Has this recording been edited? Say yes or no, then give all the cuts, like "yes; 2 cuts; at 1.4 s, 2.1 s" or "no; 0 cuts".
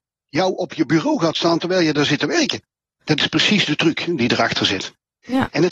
yes; 1 cut; at 2.9 s